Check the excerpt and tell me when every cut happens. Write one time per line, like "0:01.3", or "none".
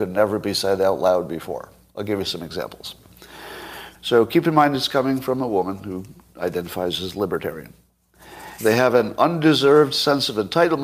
0:03.9
0:08.6